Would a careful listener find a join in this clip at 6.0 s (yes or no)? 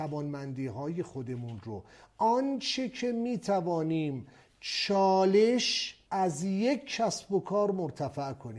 yes